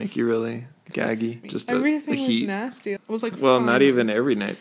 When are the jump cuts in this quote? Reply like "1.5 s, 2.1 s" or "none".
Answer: 1.4 s, 3.0 s